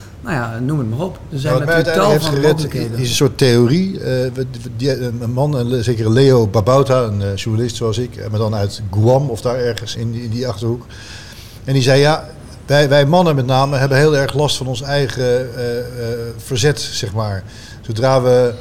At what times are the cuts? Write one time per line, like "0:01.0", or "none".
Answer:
0:09.9